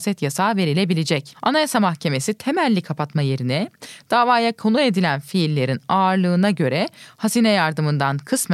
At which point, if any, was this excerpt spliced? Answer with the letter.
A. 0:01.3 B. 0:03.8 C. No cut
C